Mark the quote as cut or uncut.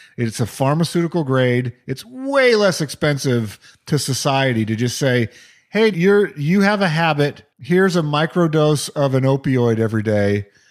cut